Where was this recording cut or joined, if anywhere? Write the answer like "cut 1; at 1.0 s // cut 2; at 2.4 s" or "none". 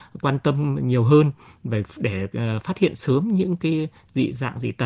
none